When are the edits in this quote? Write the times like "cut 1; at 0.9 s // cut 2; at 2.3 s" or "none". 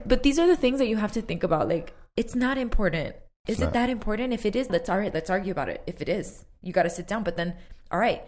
cut 1; at 4.7 s